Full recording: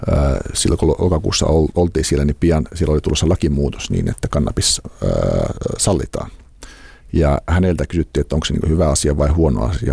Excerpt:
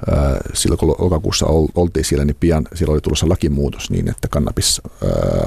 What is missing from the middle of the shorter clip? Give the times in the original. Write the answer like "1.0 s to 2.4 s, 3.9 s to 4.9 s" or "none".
none